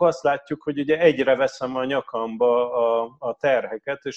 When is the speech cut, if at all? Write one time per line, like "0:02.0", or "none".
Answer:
none